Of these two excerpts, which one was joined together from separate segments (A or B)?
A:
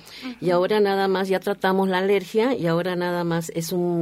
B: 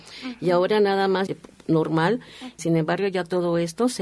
B